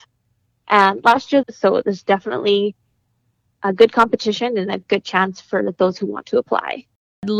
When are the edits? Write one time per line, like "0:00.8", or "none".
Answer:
0:01.4

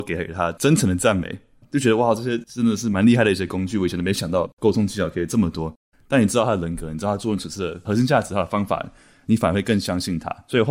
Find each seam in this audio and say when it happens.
0:05.9

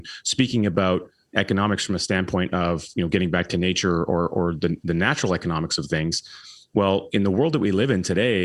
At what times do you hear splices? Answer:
none

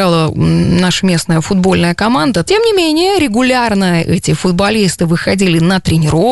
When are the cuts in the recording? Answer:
0:02.4

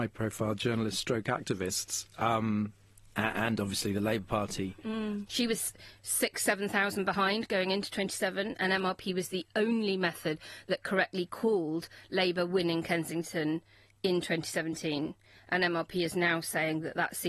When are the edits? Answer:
0:05.3

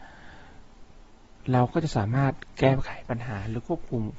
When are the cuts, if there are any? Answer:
none

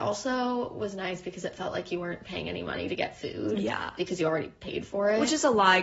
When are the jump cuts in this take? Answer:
none

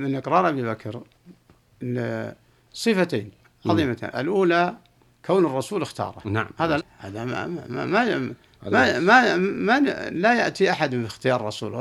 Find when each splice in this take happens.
0:06.8

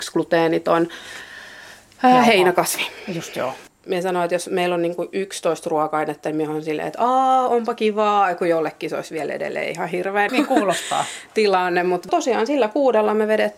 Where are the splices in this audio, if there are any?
0:10.3

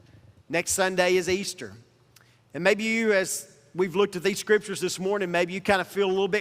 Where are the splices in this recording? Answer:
none

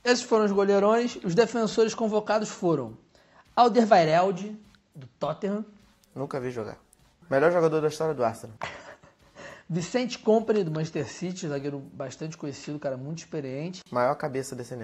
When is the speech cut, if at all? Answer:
0:07.2

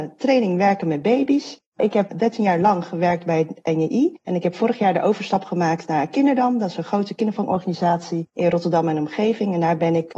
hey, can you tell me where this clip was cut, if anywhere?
none

